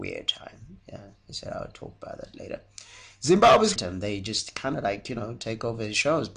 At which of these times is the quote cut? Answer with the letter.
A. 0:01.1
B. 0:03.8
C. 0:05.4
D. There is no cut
B